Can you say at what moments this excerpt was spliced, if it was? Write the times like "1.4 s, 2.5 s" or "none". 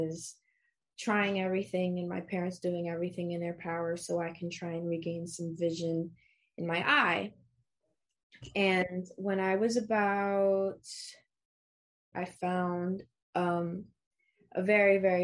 12.1 s